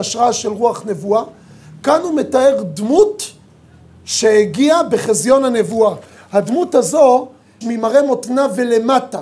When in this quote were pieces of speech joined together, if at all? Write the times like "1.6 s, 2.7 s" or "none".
7.6 s

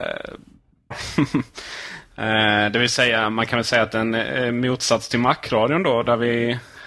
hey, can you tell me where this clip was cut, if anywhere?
0.9 s

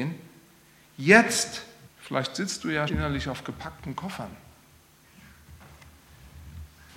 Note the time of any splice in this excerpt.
1.8 s, 2.9 s

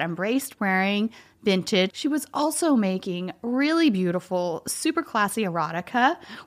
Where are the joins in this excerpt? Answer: 1.9 s

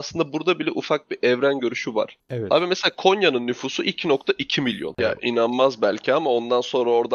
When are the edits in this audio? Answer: 5.0 s

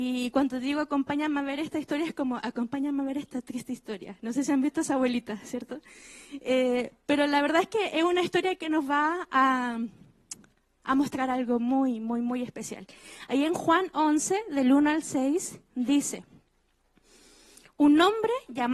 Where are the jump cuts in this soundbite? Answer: none

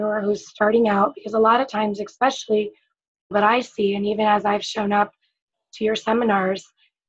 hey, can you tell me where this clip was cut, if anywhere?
3.3 s

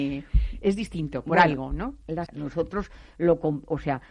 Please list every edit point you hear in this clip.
2.3 s

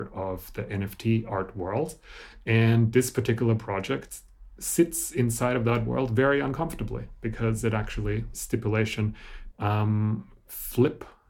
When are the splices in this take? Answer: 8.3 s, 9.5 s

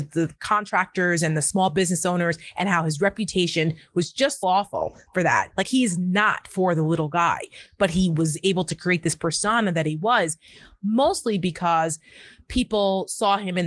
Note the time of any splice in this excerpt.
4.4 s

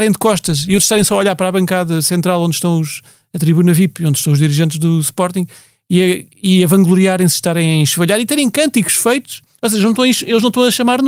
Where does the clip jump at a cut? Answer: none

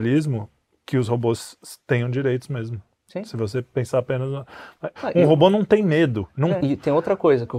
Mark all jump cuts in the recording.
5.0 s, 6.6 s

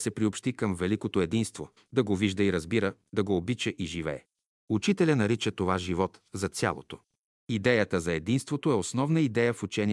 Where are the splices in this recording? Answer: 1.8 s

